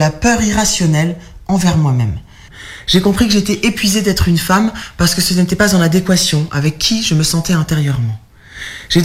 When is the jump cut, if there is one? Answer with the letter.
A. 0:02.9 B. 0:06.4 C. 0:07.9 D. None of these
D